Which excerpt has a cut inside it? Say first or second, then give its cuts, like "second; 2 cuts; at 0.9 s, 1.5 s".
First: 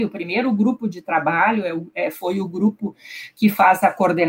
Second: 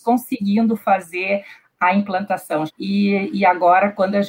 second; 1 cut; at 2.7 s